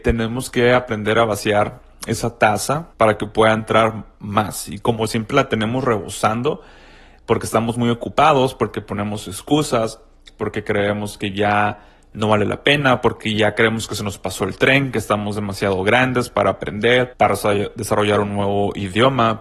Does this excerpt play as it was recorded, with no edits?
no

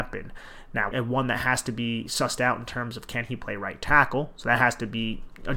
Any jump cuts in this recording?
yes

